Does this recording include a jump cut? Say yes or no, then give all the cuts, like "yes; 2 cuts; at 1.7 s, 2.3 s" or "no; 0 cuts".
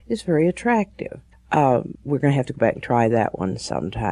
yes; 1 cut; at 1.3 s